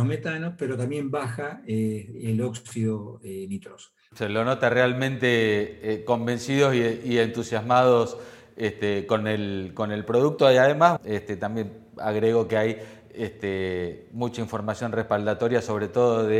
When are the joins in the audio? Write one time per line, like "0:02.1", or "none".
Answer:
0:04.1
0:11.0